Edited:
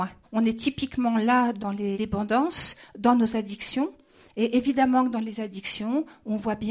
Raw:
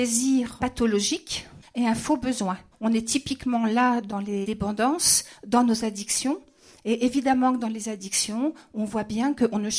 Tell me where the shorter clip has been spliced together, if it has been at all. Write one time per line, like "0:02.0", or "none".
none